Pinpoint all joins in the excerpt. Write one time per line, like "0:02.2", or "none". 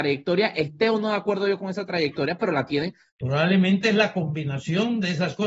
0:03.1